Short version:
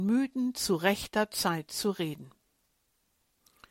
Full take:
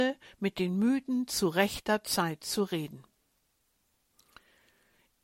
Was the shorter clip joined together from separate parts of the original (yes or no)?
no